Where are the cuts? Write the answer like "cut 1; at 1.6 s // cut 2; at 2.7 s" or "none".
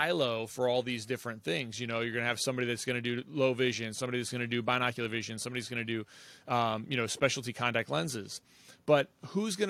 none